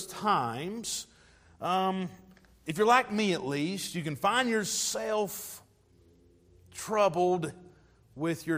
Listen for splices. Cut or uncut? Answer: uncut